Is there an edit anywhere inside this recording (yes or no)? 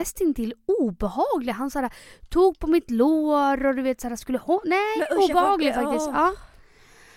no